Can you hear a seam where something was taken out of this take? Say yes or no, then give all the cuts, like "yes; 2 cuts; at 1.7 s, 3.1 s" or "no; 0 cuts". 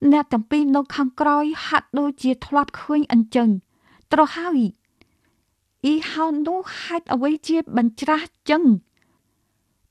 no; 0 cuts